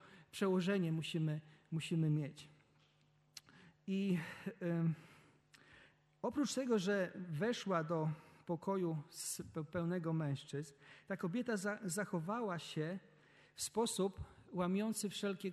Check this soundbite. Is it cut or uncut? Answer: uncut